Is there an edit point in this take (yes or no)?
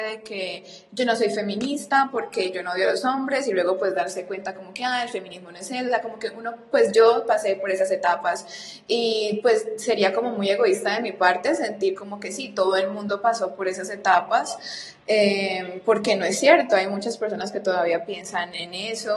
no